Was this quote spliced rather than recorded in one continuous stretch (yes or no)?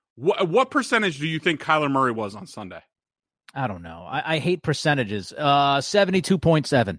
no